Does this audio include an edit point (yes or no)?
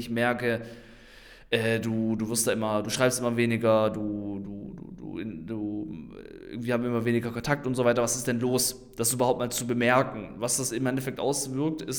no